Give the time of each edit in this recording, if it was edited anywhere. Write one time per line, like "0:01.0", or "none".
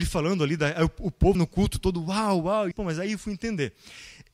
0:01.3
0:02.7